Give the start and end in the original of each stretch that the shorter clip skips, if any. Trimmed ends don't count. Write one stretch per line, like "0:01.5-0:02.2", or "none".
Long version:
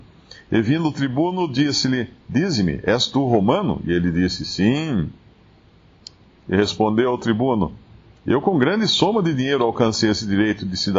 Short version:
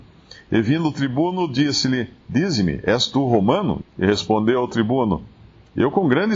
0:03.8-0:06.3

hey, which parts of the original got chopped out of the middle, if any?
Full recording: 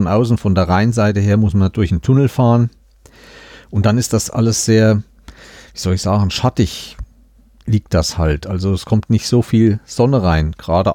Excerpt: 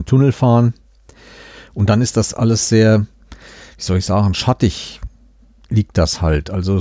none

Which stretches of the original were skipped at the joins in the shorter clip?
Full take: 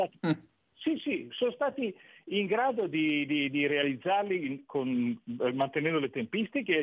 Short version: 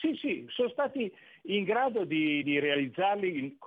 0:03.3-0:03.5

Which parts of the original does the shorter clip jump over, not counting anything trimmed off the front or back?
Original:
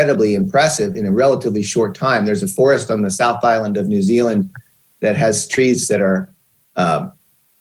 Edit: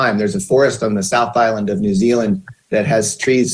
0:04.7-0:04.9

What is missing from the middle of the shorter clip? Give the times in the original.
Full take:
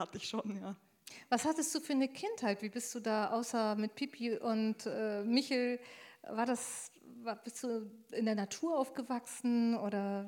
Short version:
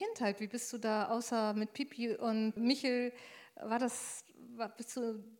0:04.8-0:05.2

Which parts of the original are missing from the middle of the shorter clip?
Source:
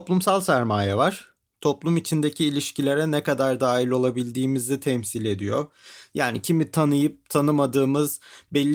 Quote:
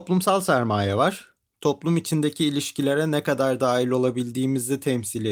none

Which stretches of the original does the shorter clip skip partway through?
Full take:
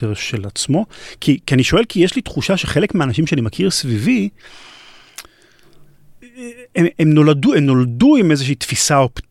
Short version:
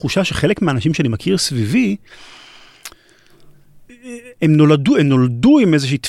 0:06.7-0:06.9

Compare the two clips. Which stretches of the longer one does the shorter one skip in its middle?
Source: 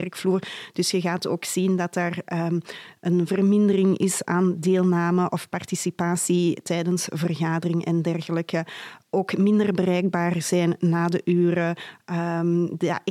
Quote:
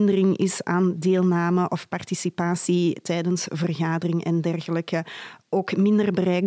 none

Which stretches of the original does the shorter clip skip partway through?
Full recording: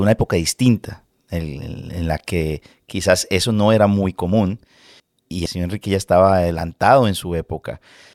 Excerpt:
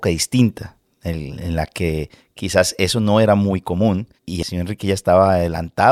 0:01.6-0:01.8
0:04.7-0:05.2

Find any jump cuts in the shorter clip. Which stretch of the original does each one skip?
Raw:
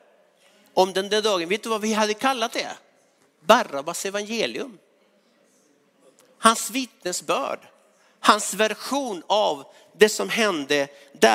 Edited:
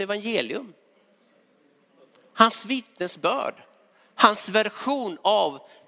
none

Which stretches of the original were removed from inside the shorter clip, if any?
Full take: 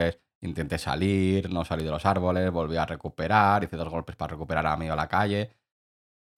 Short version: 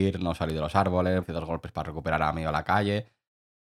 0:02.5-0:03.7

